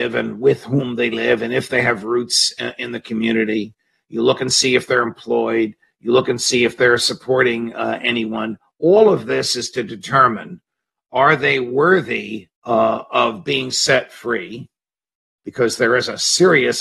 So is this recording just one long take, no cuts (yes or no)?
no